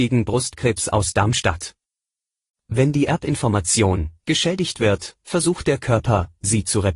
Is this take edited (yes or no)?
yes